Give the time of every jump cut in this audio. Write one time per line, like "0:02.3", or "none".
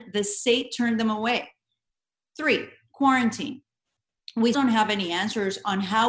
0:04.5